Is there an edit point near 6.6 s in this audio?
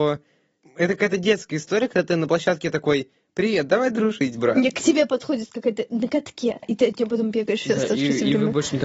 yes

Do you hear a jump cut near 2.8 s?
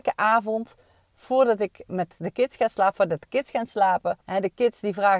no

